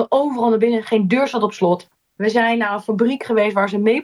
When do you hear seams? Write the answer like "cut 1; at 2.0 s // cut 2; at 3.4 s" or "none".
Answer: none